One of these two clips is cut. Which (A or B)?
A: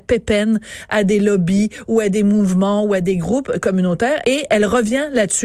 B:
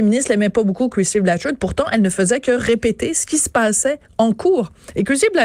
A